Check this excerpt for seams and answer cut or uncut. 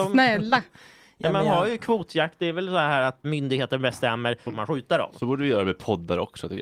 cut